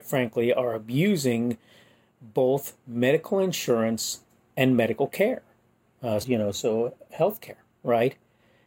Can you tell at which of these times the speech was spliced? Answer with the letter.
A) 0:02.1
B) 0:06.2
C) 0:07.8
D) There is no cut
B